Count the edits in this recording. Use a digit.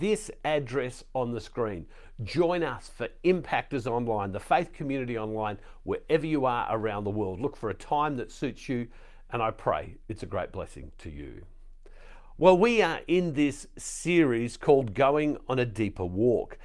0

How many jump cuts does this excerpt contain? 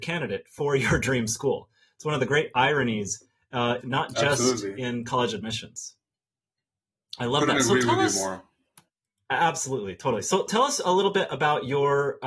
2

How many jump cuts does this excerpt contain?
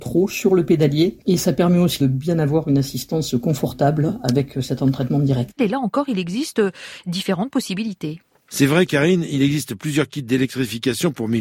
1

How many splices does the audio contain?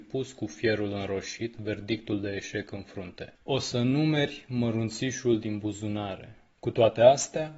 2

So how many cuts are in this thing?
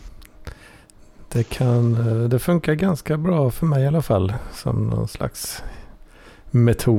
0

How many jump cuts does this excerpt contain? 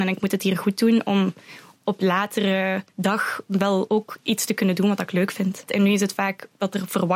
2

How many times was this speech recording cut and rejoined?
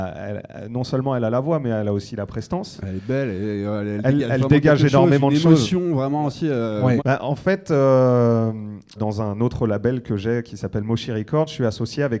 2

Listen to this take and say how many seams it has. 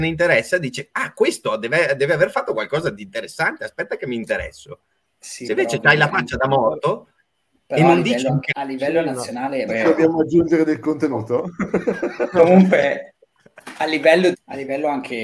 3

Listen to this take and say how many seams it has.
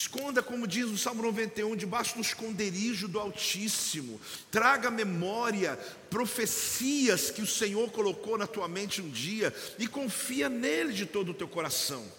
0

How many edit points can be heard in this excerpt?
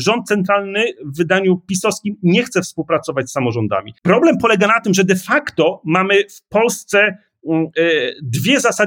1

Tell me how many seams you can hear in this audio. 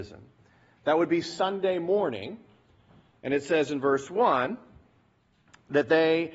0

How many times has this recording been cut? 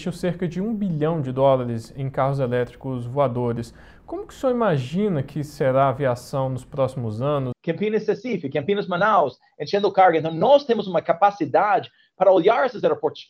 1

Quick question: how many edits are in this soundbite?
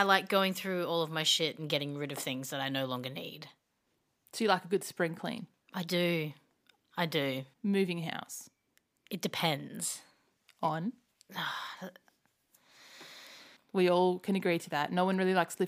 2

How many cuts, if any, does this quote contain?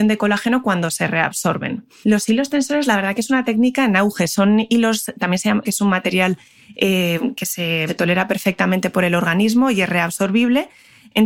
3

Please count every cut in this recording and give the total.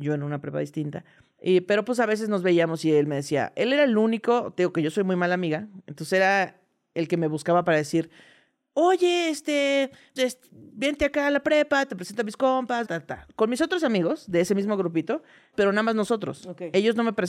3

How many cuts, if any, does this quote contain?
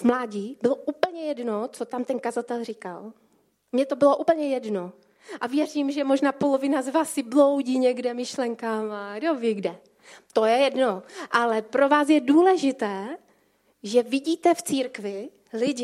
0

